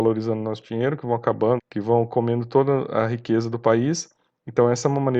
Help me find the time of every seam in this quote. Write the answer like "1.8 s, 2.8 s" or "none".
1.6 s

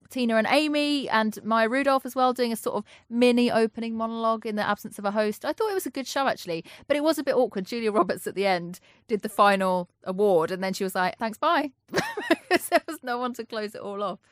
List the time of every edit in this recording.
11.2 s

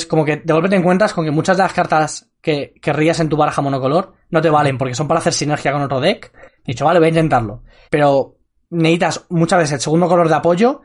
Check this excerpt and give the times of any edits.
6.6 s, 7.8 s

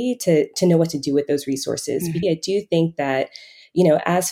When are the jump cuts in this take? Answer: 2.2 s

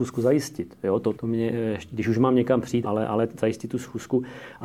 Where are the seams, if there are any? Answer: 1.1 s, 2.8 s

